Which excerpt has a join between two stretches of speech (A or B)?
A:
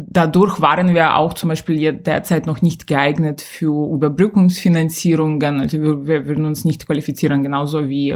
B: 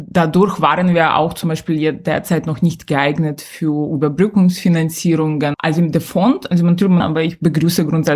B